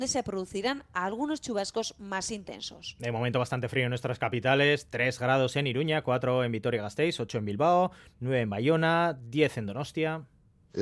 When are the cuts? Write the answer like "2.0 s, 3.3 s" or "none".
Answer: none